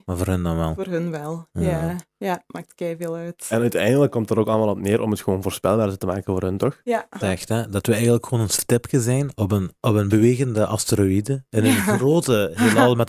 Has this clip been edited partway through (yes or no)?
yes